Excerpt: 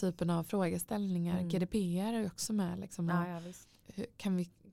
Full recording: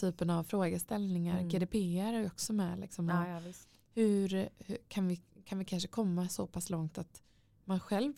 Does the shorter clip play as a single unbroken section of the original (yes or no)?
no